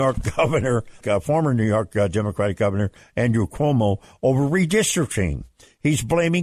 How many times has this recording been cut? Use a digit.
1